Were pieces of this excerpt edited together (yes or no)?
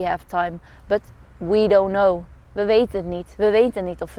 yes